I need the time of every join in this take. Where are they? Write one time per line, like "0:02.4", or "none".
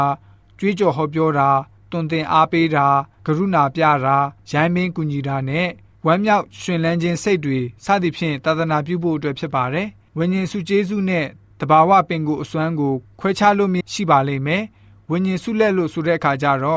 0:13.8

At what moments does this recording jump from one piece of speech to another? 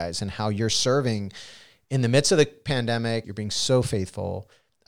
0:03.2

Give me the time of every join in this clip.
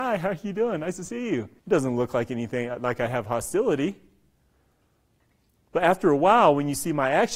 0:01.6

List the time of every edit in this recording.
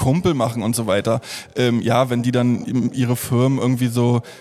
none

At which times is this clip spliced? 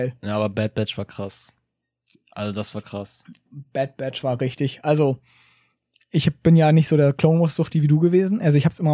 none

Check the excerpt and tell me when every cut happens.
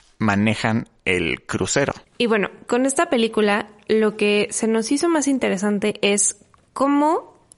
0:02.0

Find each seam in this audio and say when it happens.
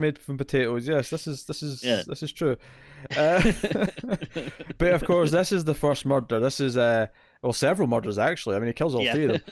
none

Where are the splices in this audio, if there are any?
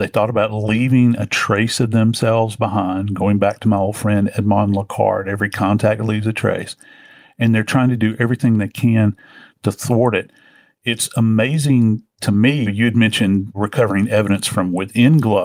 0:12.7

